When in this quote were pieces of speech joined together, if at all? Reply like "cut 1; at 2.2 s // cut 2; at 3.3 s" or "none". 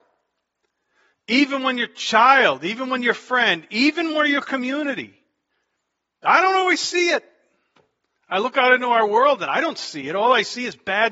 none